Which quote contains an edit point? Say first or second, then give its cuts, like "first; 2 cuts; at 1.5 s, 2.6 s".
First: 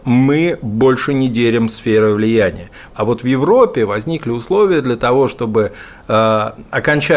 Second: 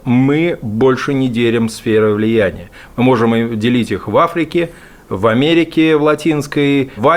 first; 1 cut; at 2.9 s